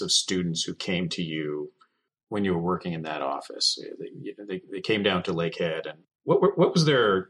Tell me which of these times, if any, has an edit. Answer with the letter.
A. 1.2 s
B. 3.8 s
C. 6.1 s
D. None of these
D